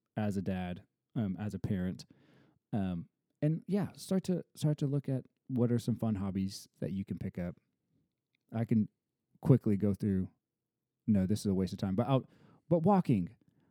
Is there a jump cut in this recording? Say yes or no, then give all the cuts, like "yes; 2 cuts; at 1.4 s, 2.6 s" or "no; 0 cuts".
no; 0 cuts